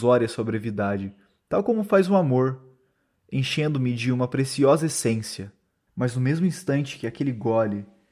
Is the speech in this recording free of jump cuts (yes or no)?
no